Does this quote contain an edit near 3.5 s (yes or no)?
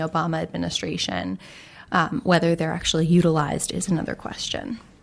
no